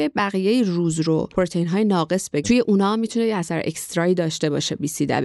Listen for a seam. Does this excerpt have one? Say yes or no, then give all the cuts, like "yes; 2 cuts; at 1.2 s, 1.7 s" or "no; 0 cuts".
yes; 1 cut; at 2.4 s